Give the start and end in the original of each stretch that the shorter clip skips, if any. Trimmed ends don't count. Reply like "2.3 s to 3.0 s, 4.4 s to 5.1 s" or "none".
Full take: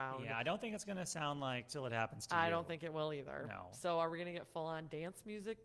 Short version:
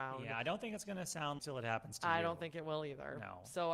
1.4 s to 1.7 s